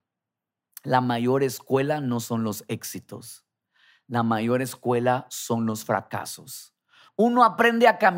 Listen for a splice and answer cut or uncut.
cut